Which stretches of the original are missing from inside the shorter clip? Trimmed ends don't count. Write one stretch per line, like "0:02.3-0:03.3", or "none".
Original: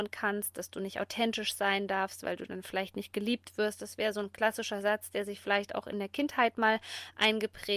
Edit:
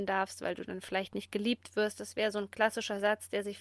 none